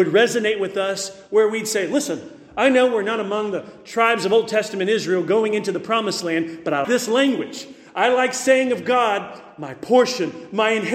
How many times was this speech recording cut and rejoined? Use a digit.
1